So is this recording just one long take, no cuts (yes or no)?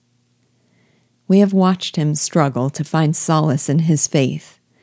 yes